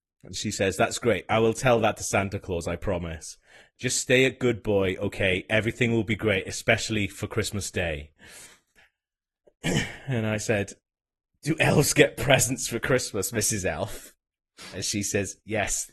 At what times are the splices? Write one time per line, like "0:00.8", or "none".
none